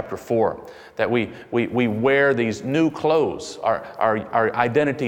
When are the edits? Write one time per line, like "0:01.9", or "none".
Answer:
none